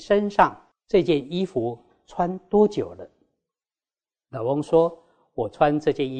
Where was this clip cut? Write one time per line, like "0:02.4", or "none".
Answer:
none